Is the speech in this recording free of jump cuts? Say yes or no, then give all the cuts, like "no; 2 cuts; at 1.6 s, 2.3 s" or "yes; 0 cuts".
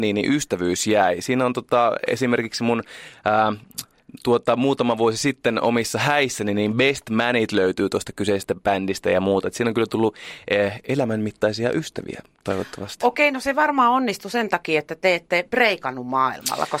yes; 0 cuts